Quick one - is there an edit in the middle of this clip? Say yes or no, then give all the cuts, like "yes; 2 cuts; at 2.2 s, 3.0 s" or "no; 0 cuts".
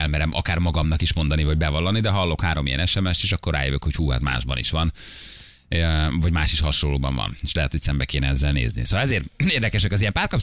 no; 0 cuts